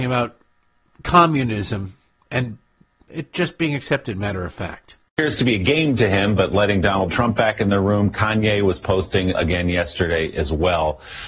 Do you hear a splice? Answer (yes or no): yes